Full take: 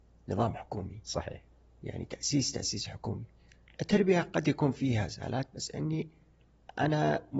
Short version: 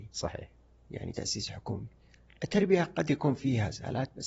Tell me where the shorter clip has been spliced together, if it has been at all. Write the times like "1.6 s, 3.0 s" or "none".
1.1 s